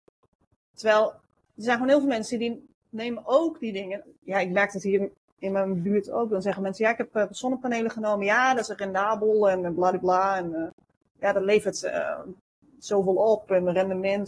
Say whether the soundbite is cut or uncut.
cut